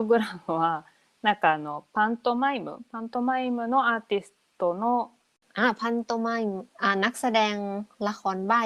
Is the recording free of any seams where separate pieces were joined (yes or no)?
no